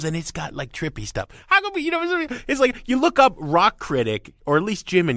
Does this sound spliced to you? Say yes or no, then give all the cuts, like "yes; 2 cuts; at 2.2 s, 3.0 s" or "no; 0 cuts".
no; 0 cuts